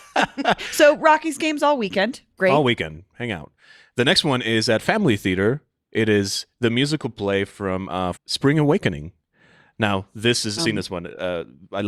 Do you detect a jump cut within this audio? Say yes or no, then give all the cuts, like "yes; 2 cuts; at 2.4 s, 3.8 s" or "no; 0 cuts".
yes; 2 cuts; at 8.1 s, 10.6 s